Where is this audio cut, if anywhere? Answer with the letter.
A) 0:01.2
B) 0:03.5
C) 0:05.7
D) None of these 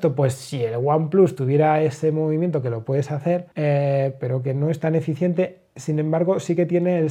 B